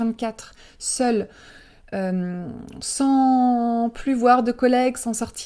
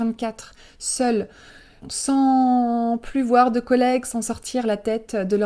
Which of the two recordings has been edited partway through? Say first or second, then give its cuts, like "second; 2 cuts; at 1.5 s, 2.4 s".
second; 1 cut; at 1.8 s